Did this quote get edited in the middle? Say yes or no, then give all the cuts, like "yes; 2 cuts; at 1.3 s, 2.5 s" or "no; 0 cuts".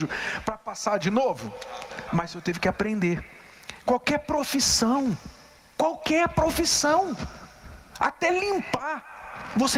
yes; 1 cut; at 2.1 s